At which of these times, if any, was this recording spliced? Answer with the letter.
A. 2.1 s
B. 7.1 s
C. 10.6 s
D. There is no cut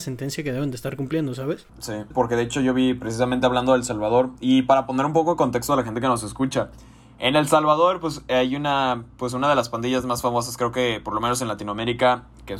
A